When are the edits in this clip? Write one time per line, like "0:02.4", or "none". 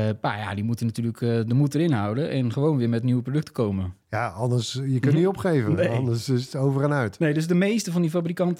0:04.0